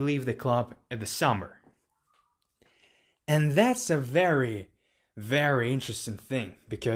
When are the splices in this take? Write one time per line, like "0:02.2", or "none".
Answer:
none